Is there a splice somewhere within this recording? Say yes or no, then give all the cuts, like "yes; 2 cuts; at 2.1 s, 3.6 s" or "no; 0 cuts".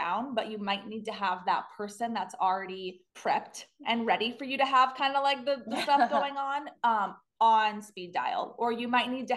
yes; 1 cut; at 3.1 s